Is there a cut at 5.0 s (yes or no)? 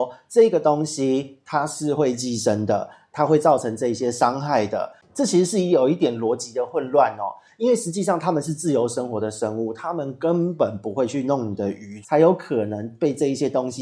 no